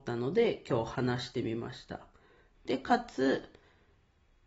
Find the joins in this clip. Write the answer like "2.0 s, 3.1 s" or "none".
2.5 s